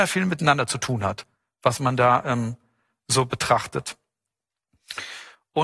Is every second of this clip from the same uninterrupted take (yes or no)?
yes